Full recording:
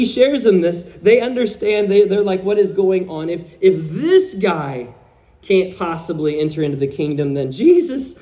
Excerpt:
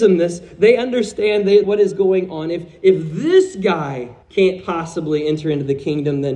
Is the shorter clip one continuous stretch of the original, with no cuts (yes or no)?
no